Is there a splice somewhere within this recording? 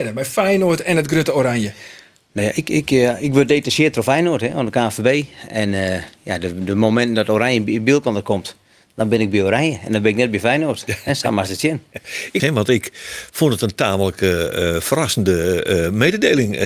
yes; 1 cut; at 12.4 s

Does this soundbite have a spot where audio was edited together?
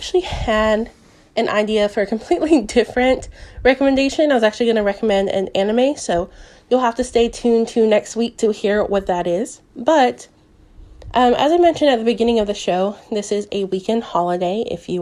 no; 0 cuts

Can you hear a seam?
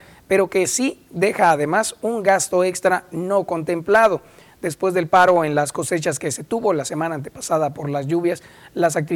no; 0 cuts

